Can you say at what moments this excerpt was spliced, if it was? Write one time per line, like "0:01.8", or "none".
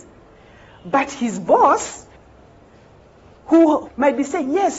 0:03.8